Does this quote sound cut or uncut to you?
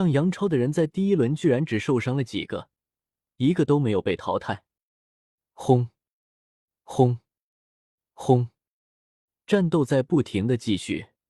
uncut